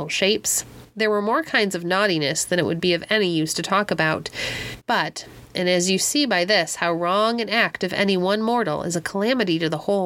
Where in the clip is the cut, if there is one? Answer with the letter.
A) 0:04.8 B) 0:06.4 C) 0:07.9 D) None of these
A